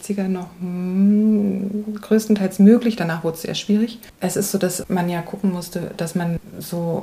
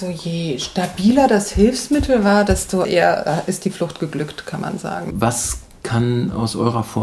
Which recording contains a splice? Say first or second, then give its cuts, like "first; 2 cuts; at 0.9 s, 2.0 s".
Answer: second; 1 cut; at 5.1 s